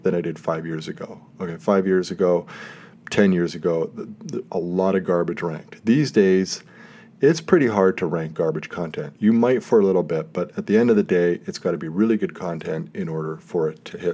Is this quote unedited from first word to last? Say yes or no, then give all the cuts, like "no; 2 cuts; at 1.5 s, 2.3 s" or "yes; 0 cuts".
yes; 0 cuts